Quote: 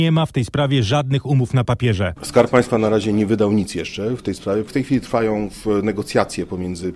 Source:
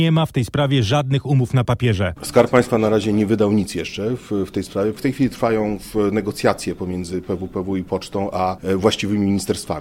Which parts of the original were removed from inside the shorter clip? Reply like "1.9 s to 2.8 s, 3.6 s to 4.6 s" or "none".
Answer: 4.2 s to 4.5 s